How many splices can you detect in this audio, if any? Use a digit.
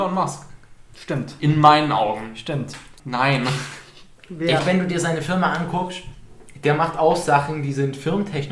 3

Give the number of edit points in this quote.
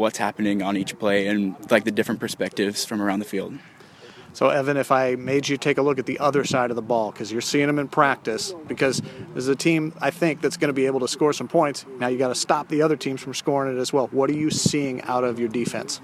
1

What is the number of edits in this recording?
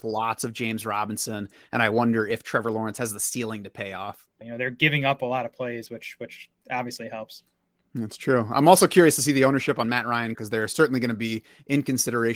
2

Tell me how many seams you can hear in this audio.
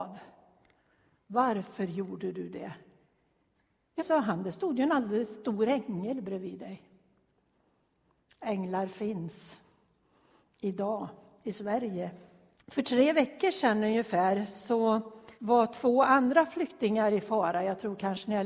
3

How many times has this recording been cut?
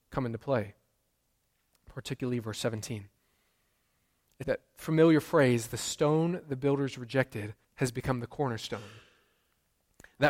2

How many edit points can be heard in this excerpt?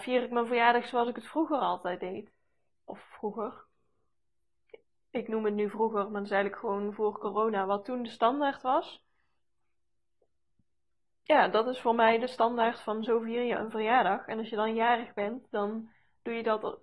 0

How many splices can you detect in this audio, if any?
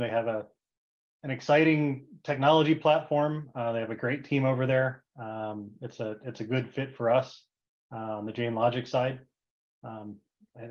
0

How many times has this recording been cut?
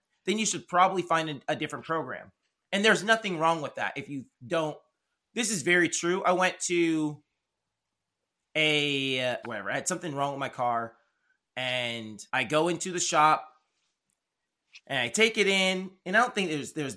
2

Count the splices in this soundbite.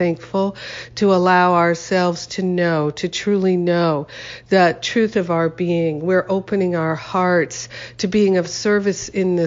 0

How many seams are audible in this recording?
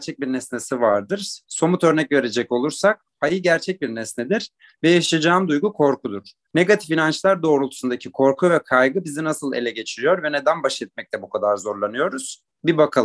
2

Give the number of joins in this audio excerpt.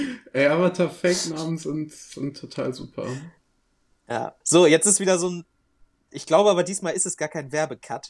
1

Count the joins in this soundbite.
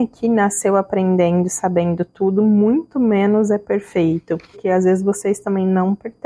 1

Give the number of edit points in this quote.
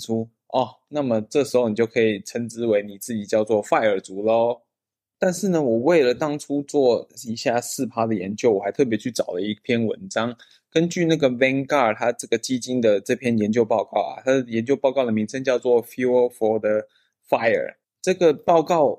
1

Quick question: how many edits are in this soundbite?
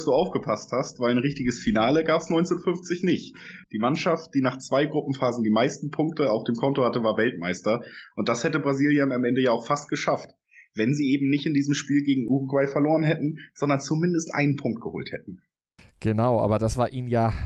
1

